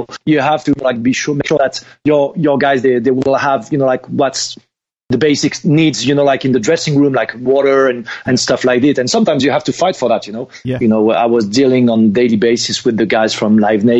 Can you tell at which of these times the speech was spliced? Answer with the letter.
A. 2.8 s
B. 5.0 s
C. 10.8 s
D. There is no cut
C